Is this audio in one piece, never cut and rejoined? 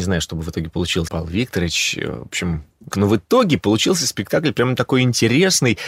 no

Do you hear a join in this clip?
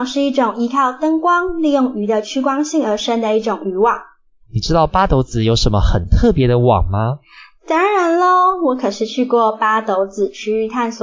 yes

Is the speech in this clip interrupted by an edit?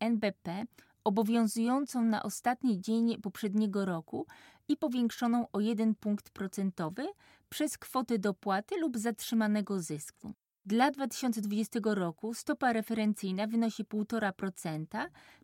no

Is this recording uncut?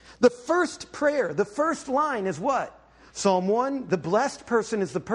no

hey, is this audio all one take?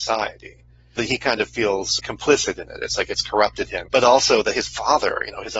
no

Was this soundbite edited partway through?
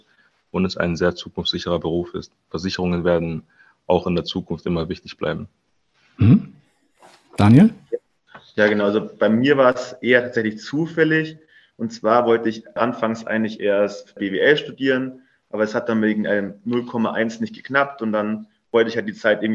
no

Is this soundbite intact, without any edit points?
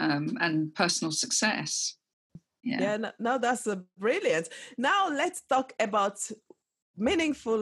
no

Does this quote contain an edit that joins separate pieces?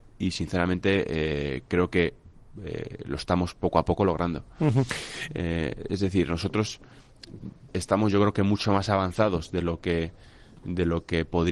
yes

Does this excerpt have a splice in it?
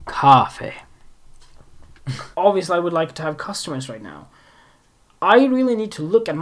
yes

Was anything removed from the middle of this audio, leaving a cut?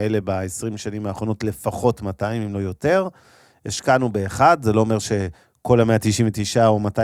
no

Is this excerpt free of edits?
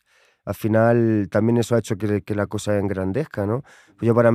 yes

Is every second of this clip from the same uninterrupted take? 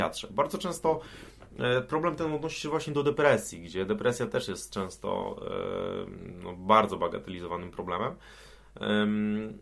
yes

